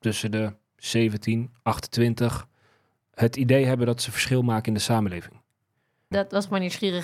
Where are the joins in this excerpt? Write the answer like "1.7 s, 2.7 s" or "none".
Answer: 6.1 s